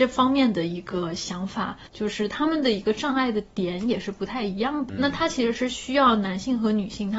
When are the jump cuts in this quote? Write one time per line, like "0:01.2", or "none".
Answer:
0:01.9
0:04.9